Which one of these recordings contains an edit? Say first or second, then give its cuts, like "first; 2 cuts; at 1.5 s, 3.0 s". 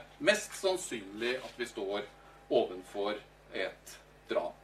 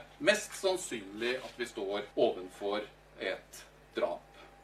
second; 1 cut; at 2.1 s